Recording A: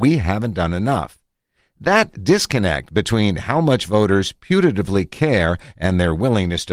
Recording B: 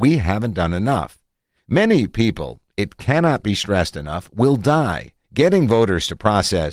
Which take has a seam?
B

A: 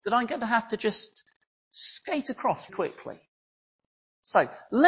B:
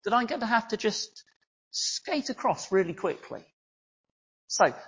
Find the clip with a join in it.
A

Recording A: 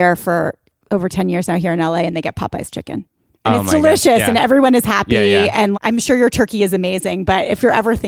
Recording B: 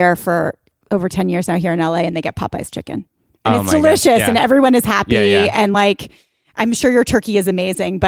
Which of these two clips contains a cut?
A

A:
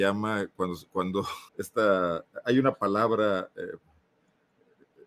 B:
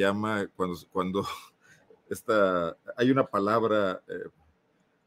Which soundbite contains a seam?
A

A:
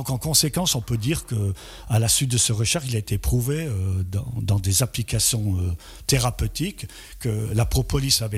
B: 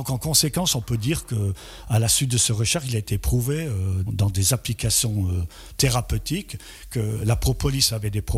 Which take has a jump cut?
B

